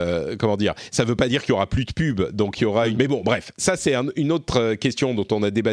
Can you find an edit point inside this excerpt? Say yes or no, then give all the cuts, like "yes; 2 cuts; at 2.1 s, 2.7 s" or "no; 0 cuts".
yes; 1 cut; at 2.9 s